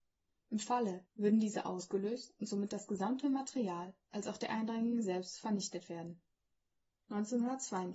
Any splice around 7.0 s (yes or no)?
no